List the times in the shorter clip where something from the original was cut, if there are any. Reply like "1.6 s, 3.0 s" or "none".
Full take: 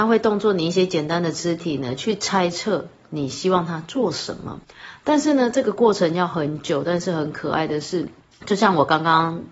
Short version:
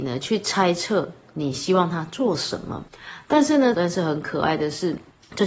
3.7 s